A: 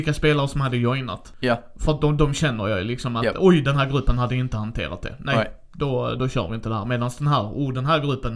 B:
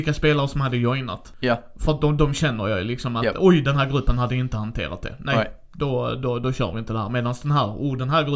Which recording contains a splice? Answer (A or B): A